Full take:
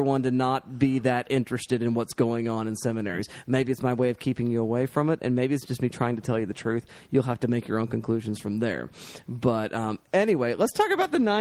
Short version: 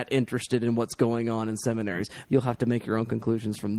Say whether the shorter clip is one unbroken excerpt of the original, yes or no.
no